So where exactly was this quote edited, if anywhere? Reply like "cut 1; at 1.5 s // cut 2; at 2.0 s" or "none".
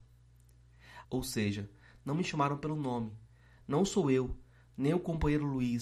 cut 1; at 1.0 s